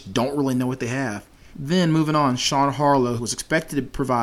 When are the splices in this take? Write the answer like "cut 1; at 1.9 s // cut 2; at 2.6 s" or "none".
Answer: cut 1; at 1.5 s // cut 2; at 3.2 s